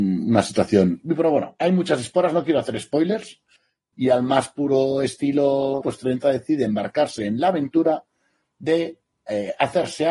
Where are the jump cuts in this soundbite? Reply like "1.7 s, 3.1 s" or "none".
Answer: 3.9 s, 5.8 s

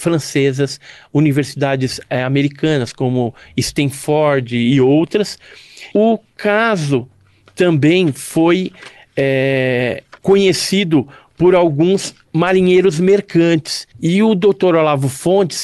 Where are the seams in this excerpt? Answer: 5.9 s, 10.2 s, 13.9 s

